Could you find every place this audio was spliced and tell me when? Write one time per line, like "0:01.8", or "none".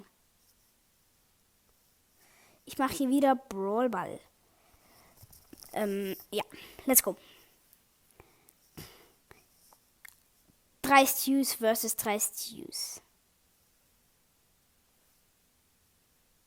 none